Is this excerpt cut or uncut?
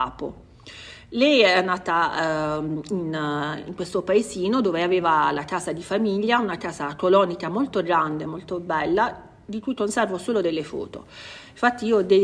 uncut